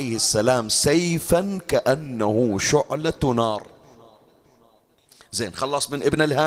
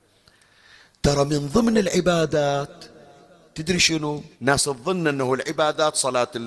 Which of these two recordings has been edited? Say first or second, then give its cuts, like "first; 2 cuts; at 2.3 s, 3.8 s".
second; 1 cut; at 4.3 s